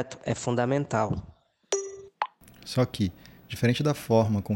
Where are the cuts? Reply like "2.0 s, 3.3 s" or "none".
none